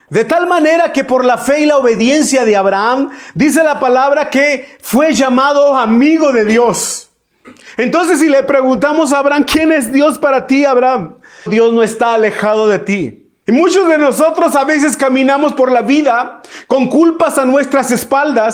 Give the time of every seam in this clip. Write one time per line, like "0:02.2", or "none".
0:11.5
0:13.4